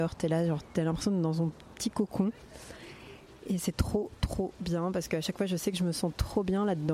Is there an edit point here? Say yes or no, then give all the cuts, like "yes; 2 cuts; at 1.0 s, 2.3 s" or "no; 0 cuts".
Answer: no; 0 cuts